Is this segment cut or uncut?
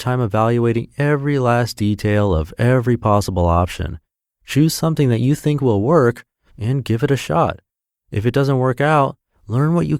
uncut